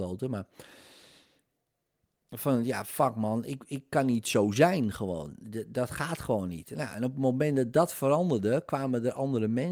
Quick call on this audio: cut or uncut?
cut